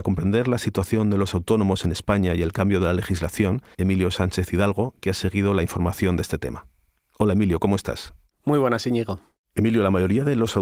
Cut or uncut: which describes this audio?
cut